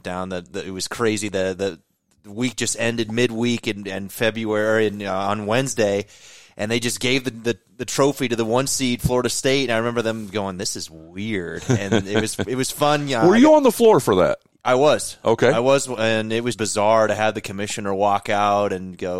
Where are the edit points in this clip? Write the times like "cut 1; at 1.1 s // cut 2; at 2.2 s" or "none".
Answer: cut 1; at 16.5 s

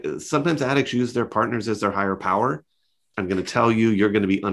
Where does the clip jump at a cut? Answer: cut 1; at 3.1 s

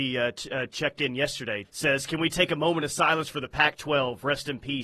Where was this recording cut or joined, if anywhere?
cut 1; at 1.6 s

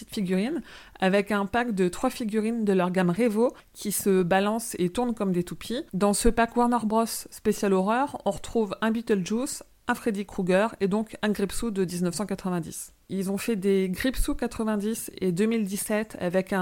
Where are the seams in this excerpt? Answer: cut 1; at 13.0 s

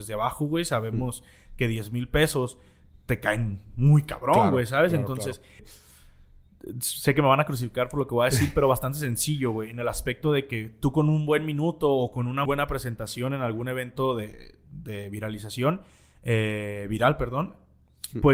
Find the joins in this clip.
cut 1; at 5.6 s // cut 2; at 12.5 s

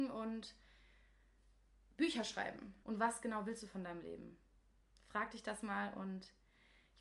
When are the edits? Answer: cut 1; at 2.8 s

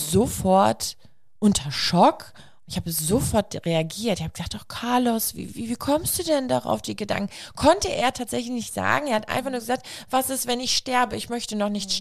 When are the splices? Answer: none

